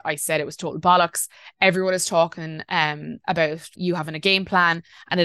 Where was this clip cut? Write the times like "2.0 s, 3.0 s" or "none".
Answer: 3.7 s